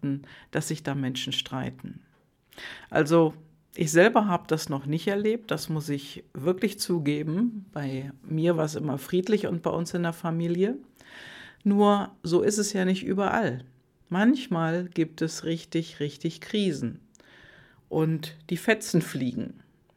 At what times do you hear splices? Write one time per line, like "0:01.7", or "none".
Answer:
none

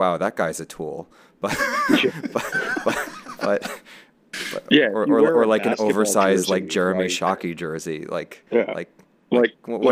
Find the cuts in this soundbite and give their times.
none

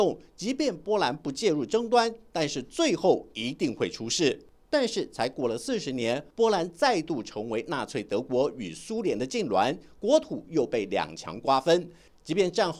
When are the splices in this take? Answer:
0:04.7
0:06.3

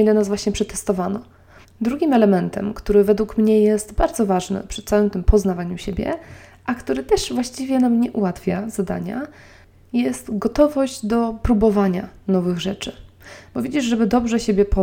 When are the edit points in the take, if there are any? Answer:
0:01.6

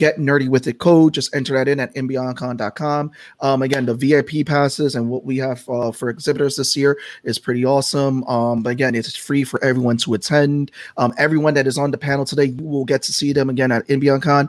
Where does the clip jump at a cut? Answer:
none

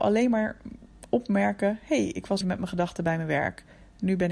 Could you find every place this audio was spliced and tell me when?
0:02.4

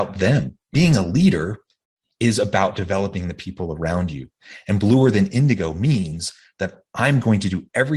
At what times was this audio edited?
none

